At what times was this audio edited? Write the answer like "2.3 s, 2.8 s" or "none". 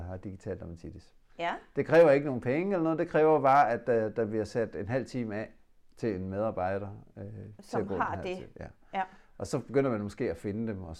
none